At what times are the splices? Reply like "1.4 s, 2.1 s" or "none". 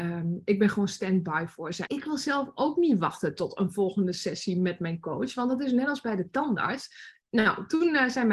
1.9 s, 7.2 s